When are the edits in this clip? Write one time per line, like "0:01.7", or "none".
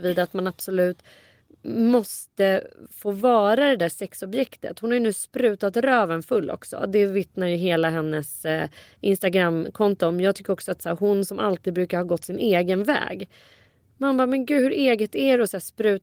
none